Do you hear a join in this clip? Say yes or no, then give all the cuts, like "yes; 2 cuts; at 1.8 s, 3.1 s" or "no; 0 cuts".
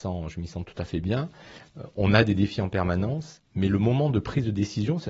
no; 0 cuts